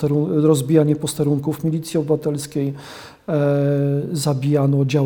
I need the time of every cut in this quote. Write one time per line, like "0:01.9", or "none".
none